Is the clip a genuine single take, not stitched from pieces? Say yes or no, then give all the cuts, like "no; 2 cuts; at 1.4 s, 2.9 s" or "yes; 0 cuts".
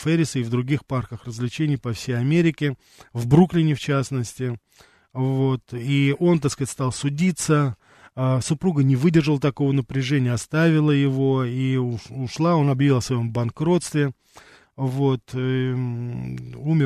yes; 0 cuts